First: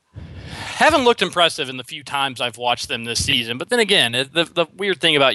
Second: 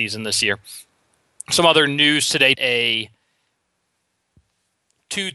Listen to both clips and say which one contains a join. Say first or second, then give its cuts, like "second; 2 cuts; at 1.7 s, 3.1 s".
second; 1 cut; at 2.5 s